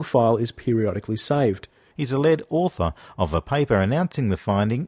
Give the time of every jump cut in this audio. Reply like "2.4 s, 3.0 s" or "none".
1.9 s